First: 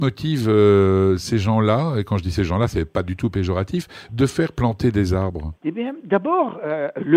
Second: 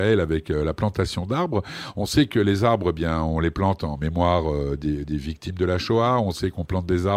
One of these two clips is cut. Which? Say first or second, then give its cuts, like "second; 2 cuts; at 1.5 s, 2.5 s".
first; 1 cut; at 5.6 s